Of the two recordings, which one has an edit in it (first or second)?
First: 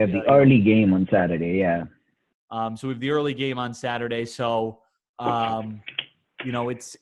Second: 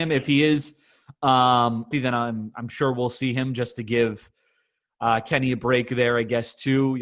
second